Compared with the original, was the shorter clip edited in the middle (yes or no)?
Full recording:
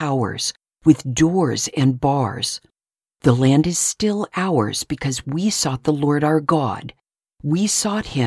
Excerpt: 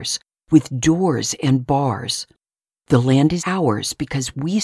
yes